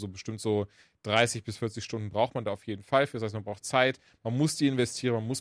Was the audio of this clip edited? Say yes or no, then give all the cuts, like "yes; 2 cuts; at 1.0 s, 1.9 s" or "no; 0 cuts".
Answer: no; 0 cuts